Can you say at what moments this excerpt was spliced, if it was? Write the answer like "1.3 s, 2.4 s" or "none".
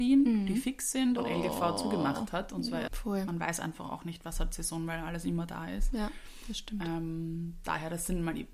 1.2 s, 2.9 s